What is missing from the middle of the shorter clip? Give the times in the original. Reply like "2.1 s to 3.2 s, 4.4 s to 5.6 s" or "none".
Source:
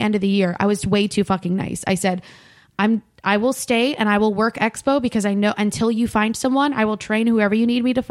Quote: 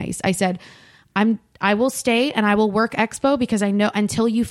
none